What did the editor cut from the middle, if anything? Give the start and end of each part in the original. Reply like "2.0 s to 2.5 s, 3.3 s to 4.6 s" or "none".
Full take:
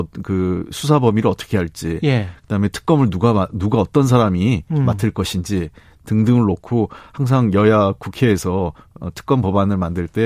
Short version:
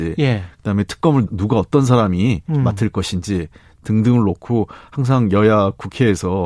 3.1 s to 3.5 s

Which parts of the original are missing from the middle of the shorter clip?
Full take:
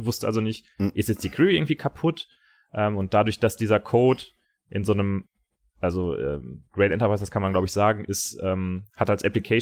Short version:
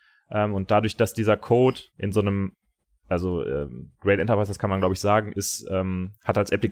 4.3 s to 4.6 s

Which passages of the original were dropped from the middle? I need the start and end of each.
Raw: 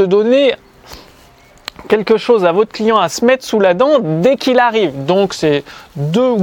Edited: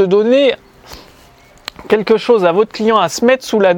none

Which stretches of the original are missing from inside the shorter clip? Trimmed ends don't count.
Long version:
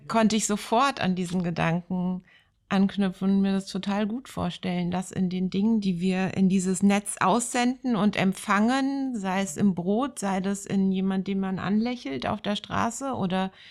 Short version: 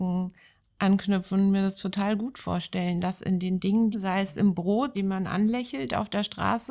5.8 s to 9.1 s, 10.1 s to 11.3 s

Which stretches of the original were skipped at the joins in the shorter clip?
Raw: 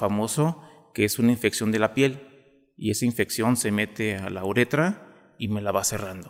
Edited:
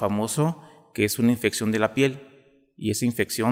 none

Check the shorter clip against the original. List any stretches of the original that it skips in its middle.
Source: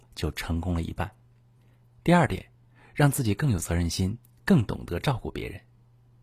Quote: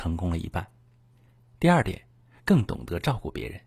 2.8 s to 4.4 s

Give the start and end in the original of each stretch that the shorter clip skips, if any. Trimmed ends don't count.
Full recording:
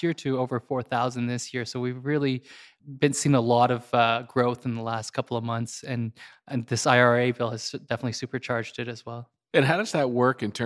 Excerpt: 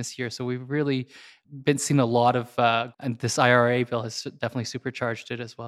4.3 s to 6.4 s

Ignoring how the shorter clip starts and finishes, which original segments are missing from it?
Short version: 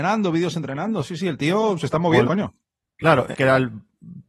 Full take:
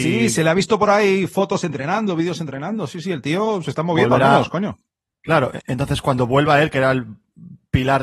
4.1 s to 4.5 s, 5.6 s to 6.7 s

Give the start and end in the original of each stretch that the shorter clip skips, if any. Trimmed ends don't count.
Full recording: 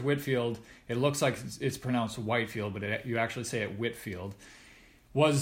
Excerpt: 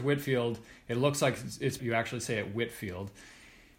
1.8 s to 3.0 s

